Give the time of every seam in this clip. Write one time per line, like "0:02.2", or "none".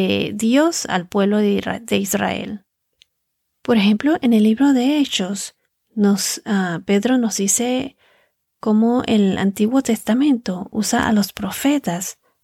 none